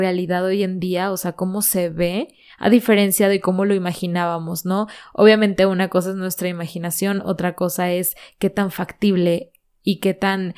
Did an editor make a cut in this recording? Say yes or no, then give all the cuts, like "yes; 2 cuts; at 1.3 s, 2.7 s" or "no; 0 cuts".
no; 0 cuts